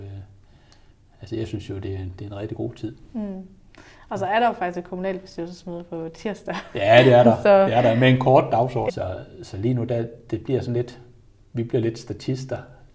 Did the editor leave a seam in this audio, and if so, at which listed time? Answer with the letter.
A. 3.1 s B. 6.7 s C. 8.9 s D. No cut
C